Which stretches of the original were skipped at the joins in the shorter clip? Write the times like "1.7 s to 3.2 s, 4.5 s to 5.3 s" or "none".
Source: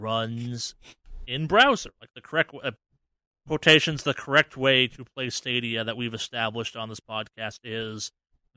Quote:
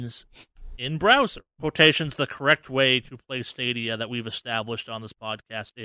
1.9 s to 3.3 s